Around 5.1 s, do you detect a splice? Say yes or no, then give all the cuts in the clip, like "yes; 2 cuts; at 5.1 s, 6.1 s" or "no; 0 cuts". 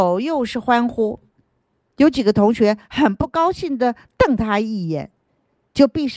no; 1 cut; at 1.9 s